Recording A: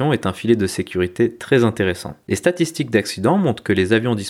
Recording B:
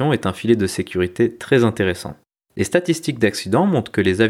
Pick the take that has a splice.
A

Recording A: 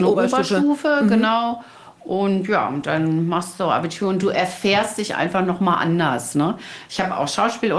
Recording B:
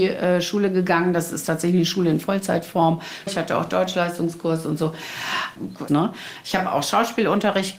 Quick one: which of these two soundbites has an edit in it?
B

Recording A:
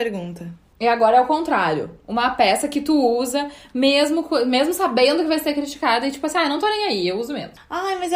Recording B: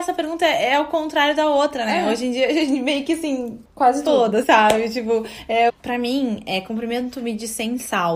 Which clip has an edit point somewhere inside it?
B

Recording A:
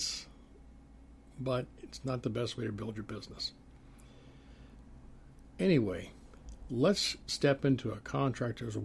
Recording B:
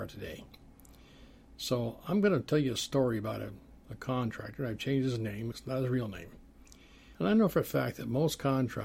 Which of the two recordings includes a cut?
B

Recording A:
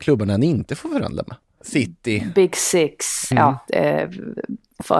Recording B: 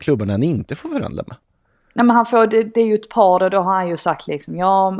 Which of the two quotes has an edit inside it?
A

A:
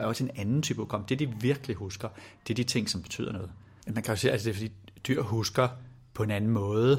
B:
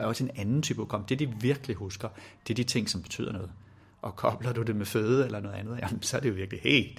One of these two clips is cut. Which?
A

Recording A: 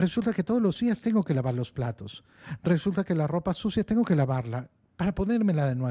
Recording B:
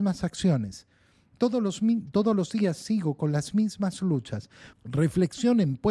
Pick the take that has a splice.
B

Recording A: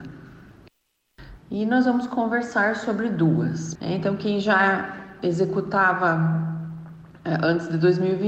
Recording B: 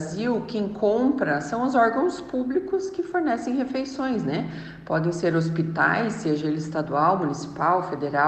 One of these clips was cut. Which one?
A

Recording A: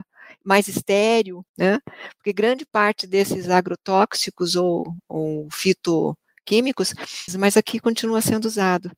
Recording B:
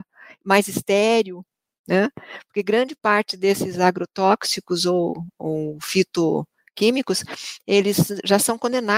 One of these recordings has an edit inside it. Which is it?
A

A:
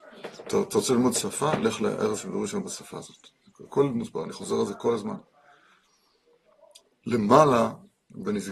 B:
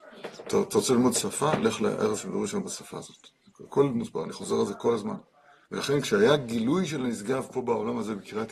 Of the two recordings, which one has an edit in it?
B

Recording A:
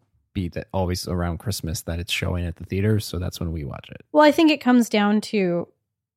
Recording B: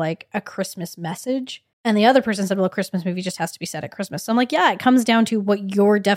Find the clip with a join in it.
B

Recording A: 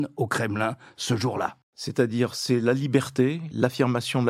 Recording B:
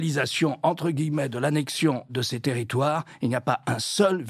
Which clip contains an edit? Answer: A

